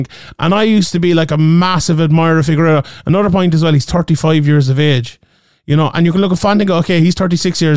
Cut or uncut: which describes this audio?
uncut